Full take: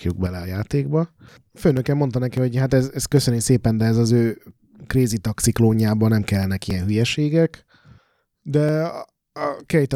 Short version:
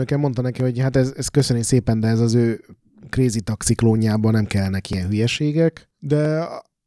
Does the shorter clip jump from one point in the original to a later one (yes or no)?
yes